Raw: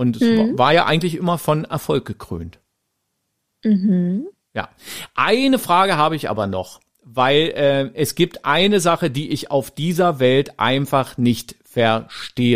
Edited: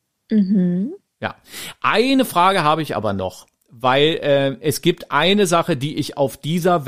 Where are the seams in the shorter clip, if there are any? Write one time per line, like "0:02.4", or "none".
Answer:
none